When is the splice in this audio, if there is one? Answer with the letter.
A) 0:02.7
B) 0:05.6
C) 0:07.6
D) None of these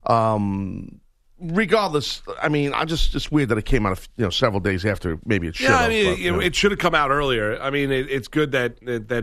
A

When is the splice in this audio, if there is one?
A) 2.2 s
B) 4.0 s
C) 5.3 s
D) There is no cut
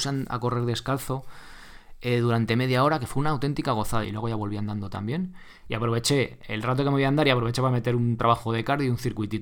B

